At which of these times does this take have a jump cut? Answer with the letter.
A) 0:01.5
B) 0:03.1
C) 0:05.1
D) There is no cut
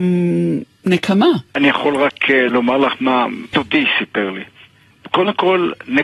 A